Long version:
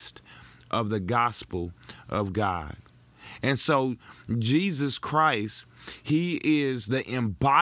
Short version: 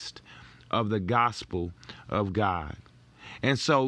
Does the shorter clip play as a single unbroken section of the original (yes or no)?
yes